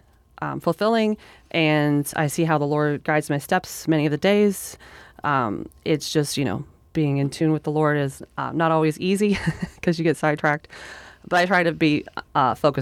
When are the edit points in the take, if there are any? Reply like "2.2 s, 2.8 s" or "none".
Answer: none